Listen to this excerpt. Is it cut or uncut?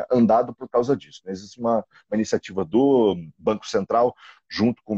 uncut